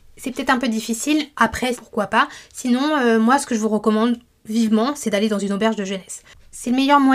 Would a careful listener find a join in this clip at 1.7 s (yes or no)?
yes